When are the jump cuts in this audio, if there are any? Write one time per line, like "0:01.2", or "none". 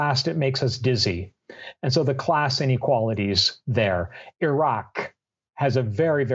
none